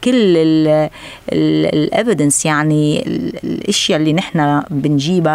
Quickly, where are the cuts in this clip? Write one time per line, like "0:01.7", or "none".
0:03.0